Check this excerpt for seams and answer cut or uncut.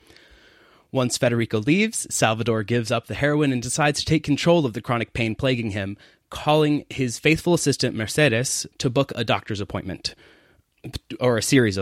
cut